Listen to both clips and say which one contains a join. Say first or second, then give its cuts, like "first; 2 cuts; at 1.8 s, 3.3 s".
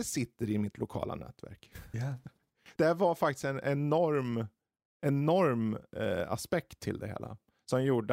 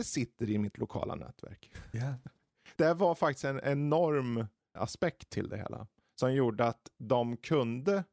second; 1 cut; at 4.8 s